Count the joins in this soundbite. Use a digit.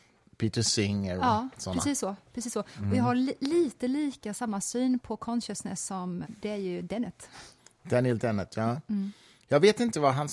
1